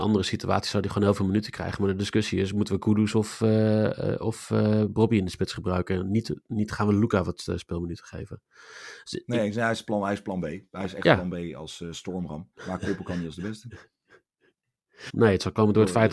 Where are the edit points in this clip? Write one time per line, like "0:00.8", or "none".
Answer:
0:12.5
0:15.1